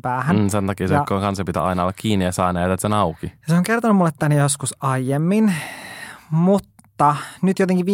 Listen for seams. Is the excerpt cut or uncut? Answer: uncut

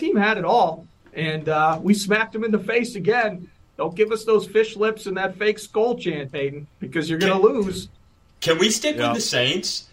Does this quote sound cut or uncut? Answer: uncut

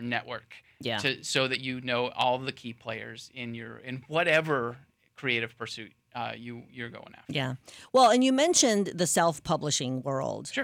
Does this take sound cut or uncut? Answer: uncut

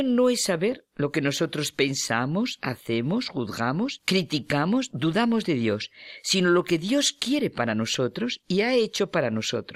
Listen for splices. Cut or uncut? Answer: cut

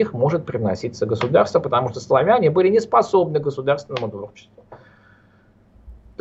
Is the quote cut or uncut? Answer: uncut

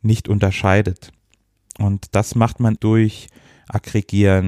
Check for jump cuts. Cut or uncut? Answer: cut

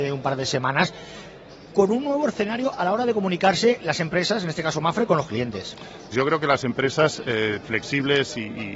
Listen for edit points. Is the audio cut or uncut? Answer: cut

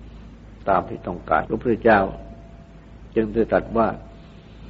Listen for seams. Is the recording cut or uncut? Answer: cut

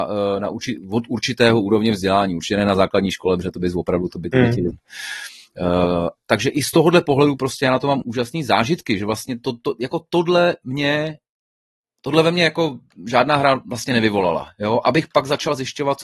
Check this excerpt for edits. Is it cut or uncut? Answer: cut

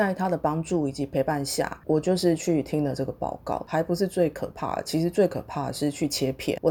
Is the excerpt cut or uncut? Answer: cut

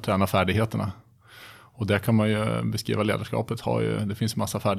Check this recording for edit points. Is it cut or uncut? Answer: uncut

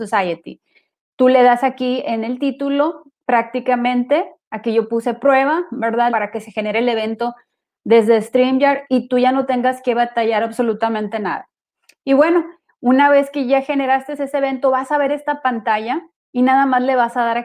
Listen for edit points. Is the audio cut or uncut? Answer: cut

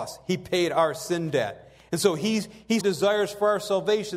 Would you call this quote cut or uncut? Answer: cut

